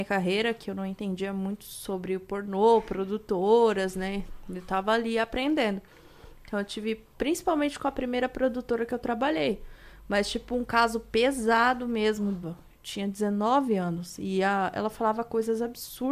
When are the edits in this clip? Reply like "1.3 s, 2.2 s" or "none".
12.4 s